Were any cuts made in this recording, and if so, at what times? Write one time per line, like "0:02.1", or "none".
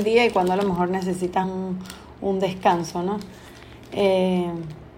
none